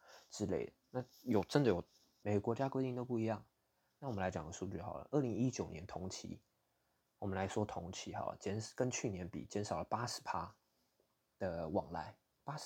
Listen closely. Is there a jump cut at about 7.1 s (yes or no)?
no